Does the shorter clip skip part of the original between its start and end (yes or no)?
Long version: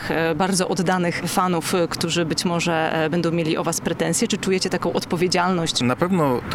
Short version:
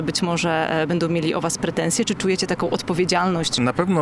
no